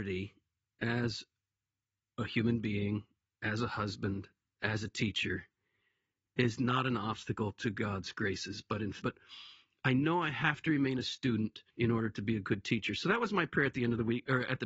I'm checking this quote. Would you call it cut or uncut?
cut